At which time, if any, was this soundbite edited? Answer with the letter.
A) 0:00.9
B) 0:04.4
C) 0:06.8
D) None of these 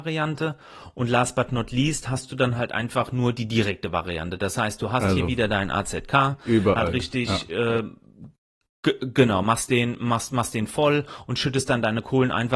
C